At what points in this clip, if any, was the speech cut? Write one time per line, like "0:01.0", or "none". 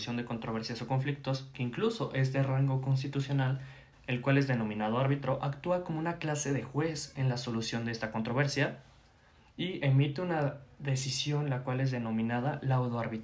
0:03.9